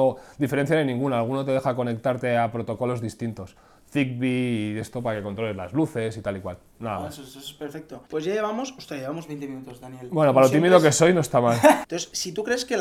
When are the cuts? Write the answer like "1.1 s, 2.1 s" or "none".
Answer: 8.1 s, 11.8 s